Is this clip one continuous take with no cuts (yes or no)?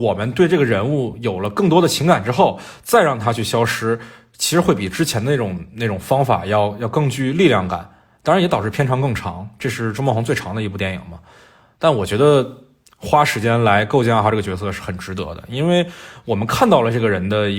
yes